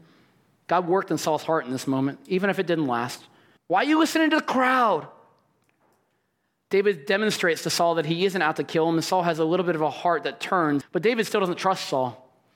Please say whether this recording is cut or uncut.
cut